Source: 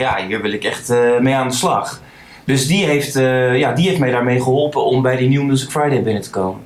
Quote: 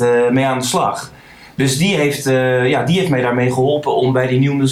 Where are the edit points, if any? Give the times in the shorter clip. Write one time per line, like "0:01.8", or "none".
none